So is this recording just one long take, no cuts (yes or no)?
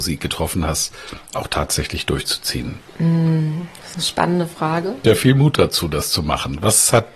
no